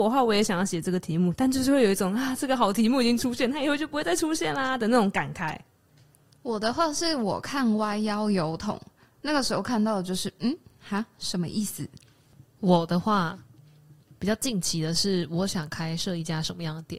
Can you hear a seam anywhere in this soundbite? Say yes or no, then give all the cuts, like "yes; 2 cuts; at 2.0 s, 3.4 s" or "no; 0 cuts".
no; 0 cuts